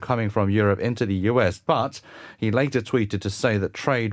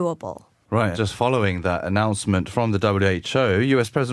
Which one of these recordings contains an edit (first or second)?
second